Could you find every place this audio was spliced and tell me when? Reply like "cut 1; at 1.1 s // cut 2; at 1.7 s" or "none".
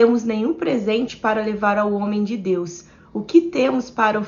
none